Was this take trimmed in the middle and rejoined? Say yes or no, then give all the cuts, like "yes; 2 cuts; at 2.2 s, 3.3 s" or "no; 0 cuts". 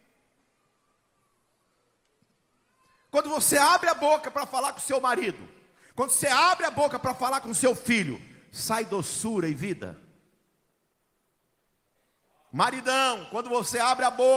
no; 0 cuts